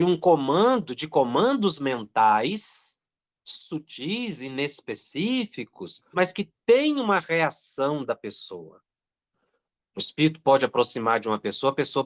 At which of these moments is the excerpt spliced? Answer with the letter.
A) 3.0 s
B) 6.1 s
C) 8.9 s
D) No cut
B